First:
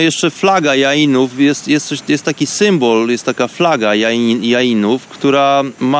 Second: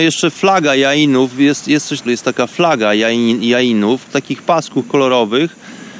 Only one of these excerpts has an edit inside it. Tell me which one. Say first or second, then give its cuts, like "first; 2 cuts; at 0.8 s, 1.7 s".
second; 2 cuts; at 2.1 s, 4.1 s